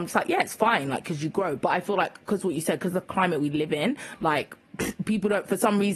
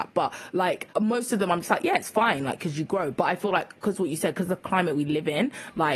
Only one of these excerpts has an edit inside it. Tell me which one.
second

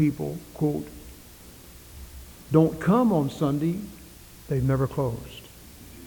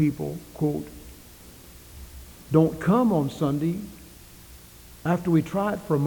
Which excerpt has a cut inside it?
first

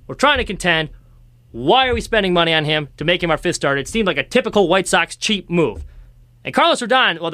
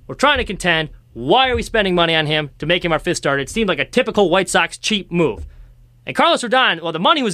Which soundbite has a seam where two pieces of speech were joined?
second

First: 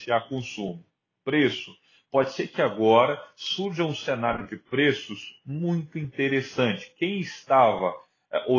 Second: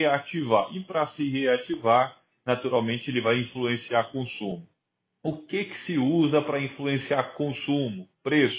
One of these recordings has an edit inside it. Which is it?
first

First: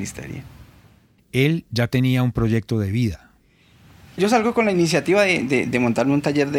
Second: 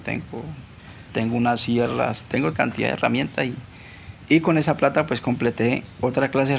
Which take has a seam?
first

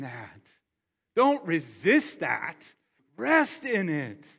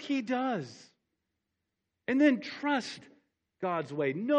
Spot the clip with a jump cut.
first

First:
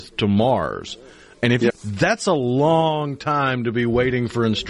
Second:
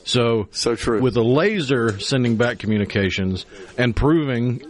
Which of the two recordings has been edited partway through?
first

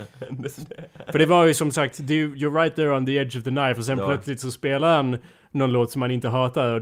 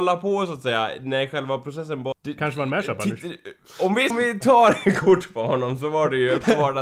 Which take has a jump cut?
second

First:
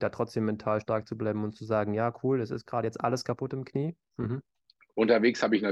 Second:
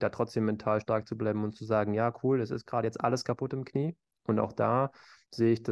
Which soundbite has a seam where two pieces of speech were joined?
first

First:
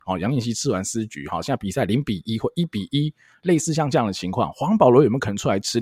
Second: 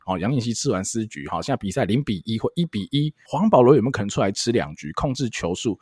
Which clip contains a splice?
second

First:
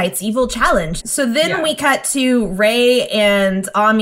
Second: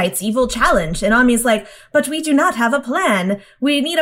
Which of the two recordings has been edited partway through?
first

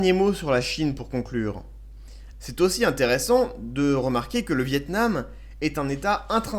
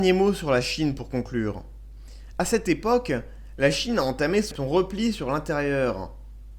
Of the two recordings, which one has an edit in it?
first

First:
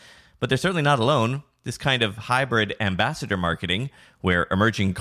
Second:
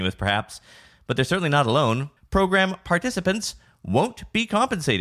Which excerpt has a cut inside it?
second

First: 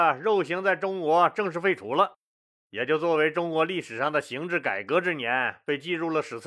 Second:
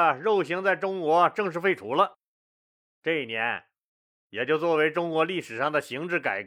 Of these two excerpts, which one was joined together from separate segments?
first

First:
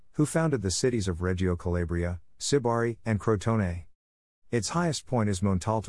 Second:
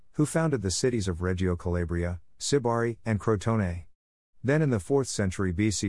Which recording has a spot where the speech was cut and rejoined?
first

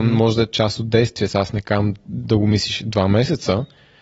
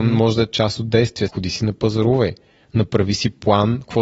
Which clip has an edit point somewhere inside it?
second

